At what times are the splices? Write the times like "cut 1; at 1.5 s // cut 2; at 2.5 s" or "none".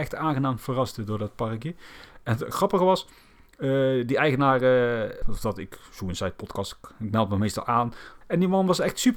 cut 1; at 5.2 s // cut 2; at 8.2 s